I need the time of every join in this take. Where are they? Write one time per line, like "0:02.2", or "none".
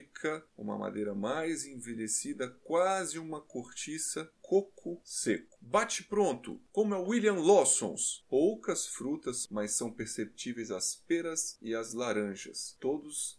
0:05.6
0:08.2